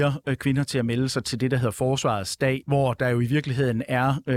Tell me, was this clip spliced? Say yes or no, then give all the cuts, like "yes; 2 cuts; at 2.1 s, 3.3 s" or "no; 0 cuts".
yes; 1 cut; at 2.6 s